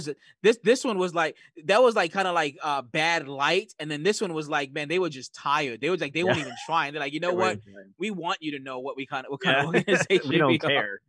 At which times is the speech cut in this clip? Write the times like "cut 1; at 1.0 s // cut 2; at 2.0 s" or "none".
none